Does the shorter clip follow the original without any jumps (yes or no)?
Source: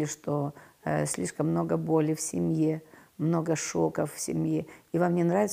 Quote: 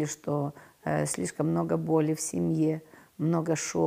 yes